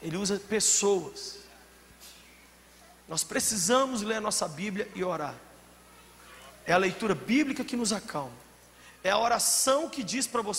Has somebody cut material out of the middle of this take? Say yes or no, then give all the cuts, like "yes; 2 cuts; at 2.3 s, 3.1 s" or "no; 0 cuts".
no; 0 cuts